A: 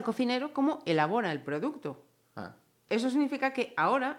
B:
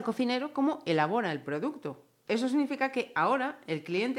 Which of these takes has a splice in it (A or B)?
B